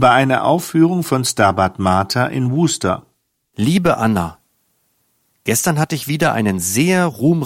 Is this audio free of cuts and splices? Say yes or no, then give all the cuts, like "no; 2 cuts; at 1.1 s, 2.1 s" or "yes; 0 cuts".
yes; 0 cuts